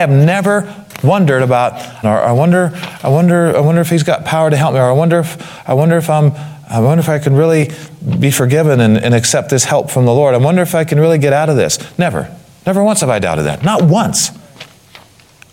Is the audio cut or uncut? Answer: cut